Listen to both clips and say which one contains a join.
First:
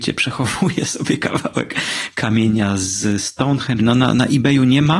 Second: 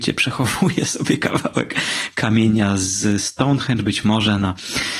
first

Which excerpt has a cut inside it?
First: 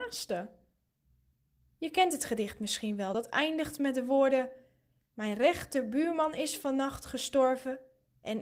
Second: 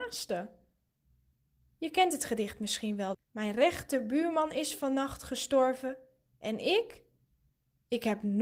second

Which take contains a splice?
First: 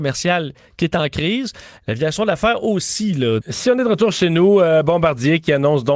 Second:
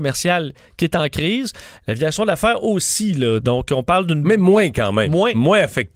first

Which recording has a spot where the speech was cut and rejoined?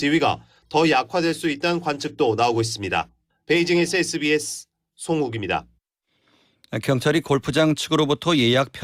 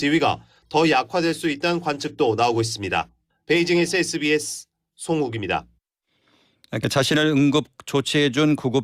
second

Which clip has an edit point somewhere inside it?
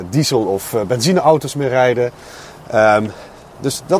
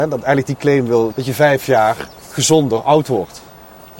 second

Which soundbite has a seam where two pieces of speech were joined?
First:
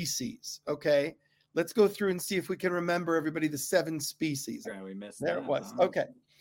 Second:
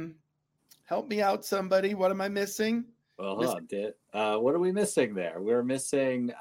first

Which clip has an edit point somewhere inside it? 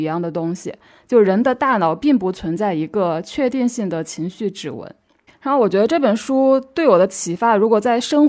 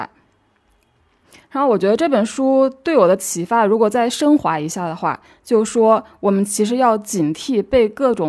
first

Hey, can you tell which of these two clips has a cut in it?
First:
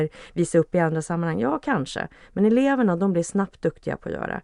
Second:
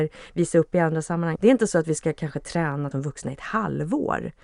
second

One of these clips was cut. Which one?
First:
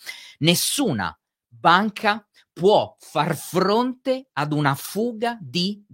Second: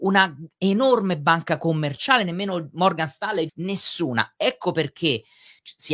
second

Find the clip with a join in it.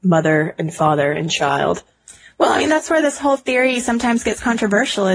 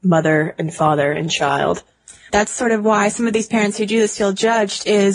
second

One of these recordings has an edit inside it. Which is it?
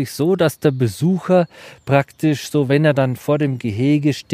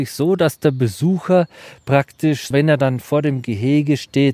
second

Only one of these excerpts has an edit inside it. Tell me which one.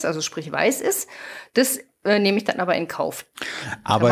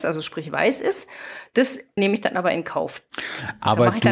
second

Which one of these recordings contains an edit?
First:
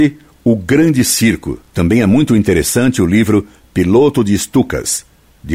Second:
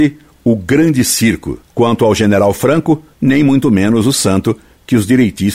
second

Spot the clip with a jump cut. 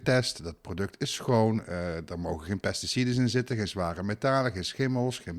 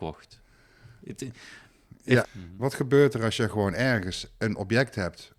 second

